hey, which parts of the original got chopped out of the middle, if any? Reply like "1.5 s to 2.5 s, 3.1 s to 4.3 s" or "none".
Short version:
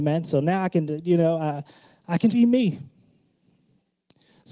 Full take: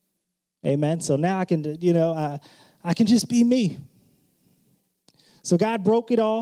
3.1 s to 3.3 s